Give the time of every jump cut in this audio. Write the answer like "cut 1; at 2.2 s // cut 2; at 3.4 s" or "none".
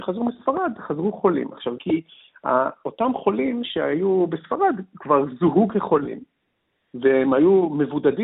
cut 1; at 1.8 s